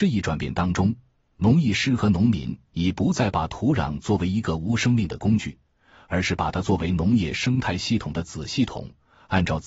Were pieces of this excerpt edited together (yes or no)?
no